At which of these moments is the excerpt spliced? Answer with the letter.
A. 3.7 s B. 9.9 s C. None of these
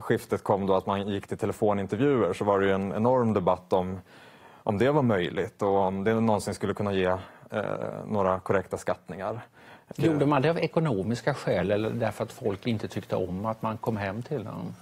B